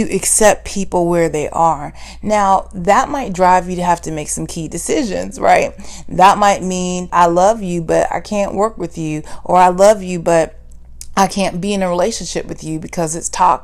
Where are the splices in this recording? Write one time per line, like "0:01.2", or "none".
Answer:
0:07.1